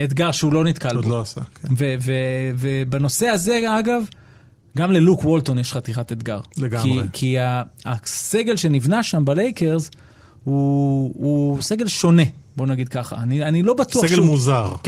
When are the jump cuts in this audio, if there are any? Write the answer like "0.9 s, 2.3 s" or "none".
none